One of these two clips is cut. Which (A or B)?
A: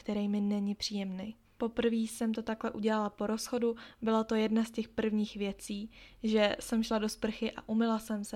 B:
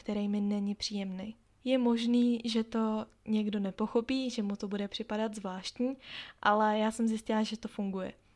A